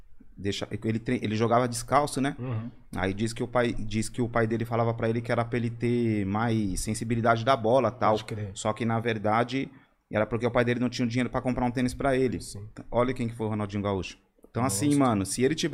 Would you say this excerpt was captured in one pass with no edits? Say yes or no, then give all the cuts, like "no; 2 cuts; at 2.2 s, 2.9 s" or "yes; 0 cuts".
yes; 0 cuts